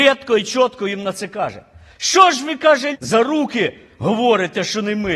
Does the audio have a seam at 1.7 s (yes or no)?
no